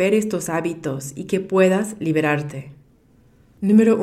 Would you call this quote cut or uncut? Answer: uncut